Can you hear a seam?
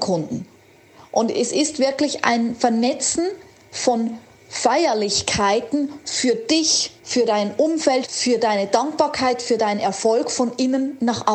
yes; 2 cuts; at 7.0 s, 8.0 s

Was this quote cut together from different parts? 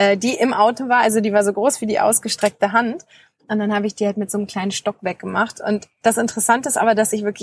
no; 0 cuts

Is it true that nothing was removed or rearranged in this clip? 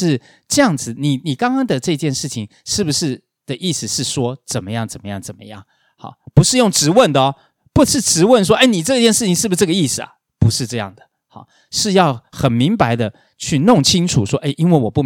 yes; 0 cuts

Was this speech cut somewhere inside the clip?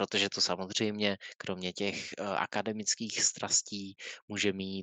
no; 0 cuts

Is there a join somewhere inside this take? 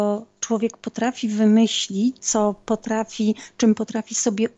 yes; 1 cut; at 2.2 s

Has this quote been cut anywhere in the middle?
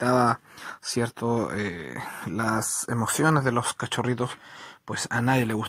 no; 0 cuts

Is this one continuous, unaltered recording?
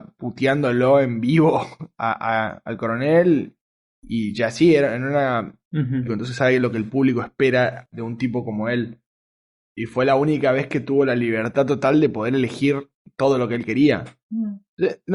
no; 1 cut; at 6.1 s

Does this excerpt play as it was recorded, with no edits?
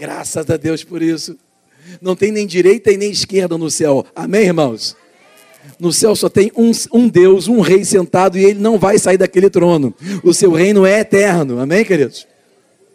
yes; 0 cuts

